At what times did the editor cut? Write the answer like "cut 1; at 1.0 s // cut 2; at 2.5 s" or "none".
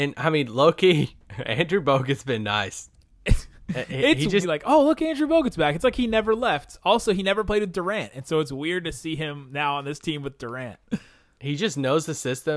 cut 1; at 4.4 s

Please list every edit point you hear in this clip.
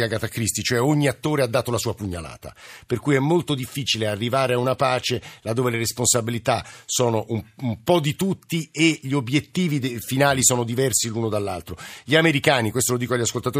none

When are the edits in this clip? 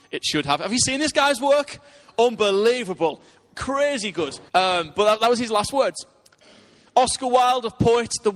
cut 1; at 4.5 s

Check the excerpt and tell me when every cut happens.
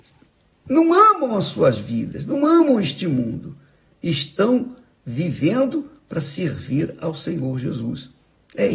none

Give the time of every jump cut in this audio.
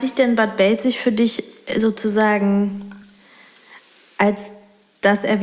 none

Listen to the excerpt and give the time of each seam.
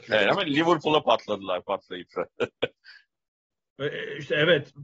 none

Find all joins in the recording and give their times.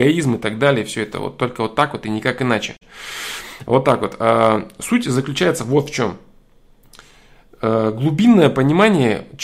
none

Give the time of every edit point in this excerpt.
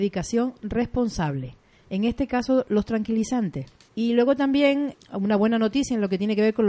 cut 1; at 3.9 s // cut 2; at 4.9 s

